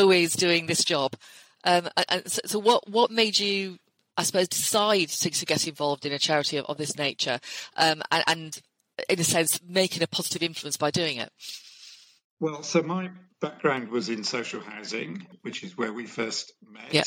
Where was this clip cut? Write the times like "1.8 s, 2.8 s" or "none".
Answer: none